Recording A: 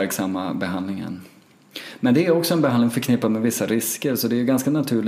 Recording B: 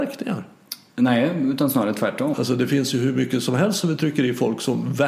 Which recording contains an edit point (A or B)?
B